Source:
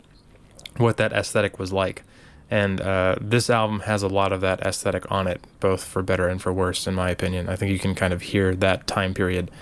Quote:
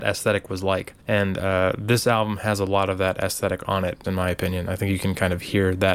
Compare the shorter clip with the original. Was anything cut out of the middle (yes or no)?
yes